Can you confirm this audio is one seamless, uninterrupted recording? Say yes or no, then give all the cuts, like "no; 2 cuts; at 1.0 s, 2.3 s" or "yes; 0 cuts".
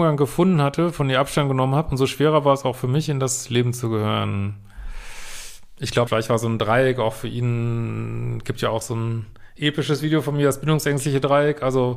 no; 1 cut; at 6.1 s